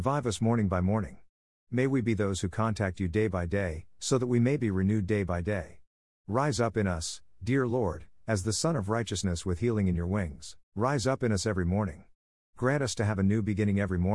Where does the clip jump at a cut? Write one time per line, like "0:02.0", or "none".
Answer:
0:04.0
0:10.6

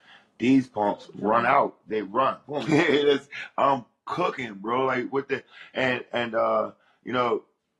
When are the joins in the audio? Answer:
0:02.7

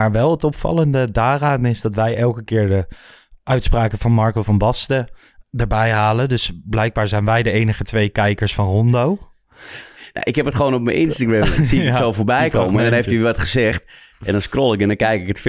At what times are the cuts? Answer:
0:05.4

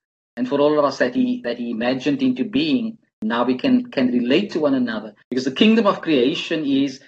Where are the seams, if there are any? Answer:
0:05.2

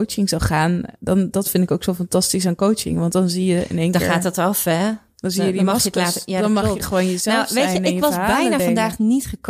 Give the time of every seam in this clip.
none

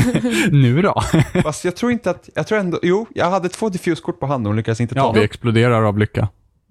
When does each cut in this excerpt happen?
0:02.3
0:05.1

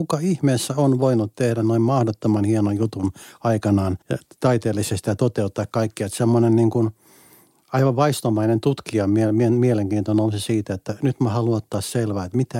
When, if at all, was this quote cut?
0:04.0

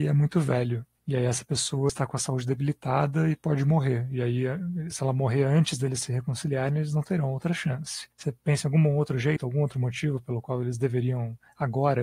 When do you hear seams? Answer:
0:04.9

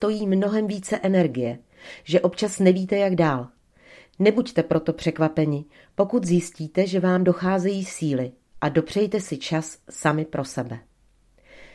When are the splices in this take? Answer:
0:08.5

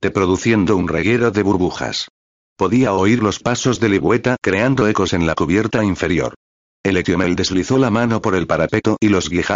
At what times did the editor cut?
none

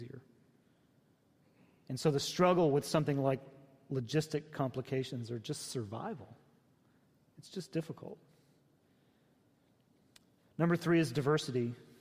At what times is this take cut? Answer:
none

